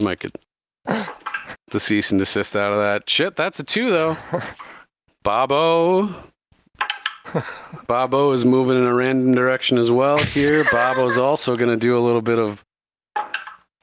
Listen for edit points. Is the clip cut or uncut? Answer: cut